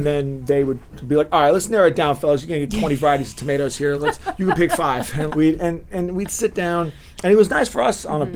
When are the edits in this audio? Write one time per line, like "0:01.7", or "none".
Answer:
0:03.9
0:05.3